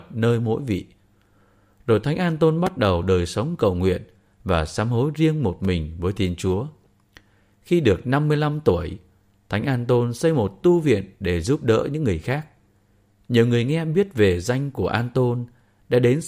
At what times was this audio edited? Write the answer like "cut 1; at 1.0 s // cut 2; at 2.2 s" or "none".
none

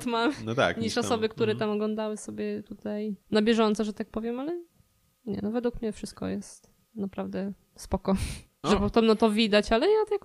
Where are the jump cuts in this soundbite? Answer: cut 1; at 3.2 s // cut 2; at 8.6 s

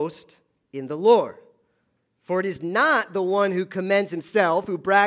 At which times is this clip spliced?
none

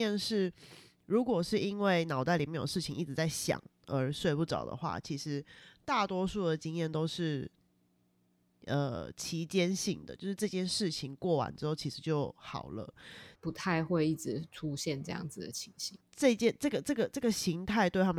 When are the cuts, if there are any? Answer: cut 1; at 13.3 s // cut 2; at 16.0 s

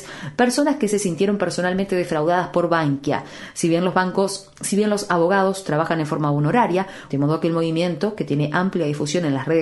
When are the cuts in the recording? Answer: cut 1; at 7.1 s

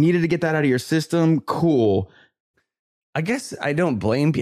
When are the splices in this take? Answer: cut 1; at 2.5 s

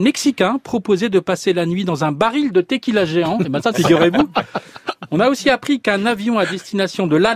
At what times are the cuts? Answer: cut 1; at 3.7 s

